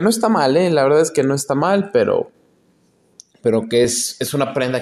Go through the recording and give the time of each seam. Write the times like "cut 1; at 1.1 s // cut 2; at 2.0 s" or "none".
none